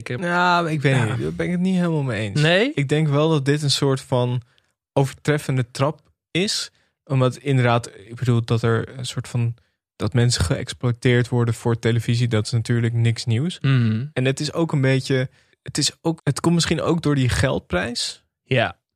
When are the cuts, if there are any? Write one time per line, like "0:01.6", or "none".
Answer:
0:14.1
0:16.2